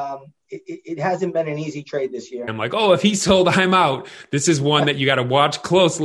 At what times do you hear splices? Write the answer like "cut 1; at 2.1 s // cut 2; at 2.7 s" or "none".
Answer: cut 1; at 2.5 s